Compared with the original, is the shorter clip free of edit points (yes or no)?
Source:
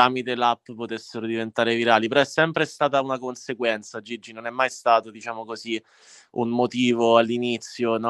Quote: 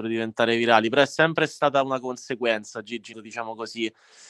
no